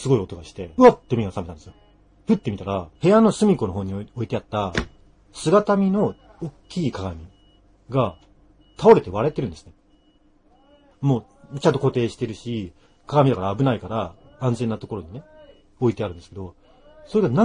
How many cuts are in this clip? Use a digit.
2